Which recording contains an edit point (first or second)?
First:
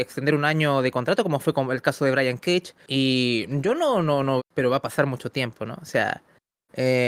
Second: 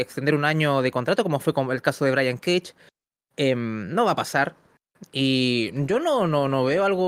first